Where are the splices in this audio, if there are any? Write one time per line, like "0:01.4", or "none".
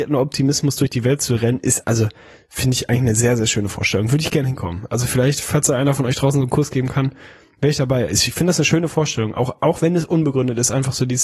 0:01.8